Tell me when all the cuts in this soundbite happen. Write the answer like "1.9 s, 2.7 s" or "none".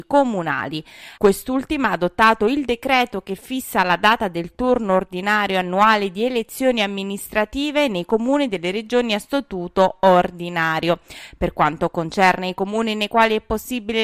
1.2 s